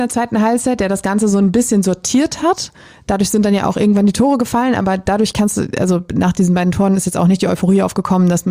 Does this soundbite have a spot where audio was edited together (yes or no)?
no